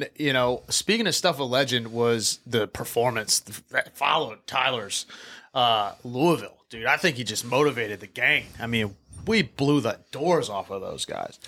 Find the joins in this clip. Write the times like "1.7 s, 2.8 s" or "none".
none